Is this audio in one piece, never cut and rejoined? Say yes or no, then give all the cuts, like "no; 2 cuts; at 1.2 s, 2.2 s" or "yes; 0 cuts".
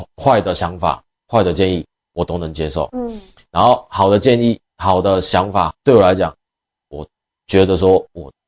no; 2 cuts; at 2.9 s, 5.7 s